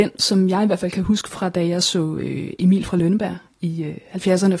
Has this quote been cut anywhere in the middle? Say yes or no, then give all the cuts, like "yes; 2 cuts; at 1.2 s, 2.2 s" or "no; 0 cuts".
no; 0 cuts